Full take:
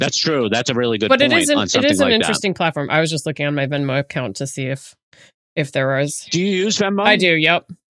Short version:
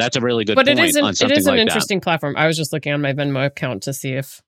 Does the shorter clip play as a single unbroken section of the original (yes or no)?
yes